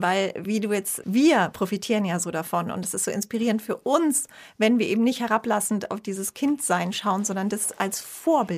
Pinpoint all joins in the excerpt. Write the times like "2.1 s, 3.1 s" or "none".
1.0 s

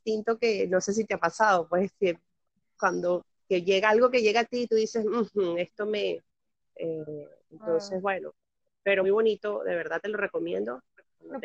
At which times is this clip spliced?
6.6 s, 9.0 s

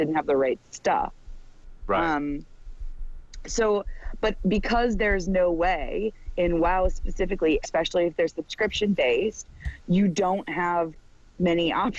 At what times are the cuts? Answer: 7.6 s, 9.8 s

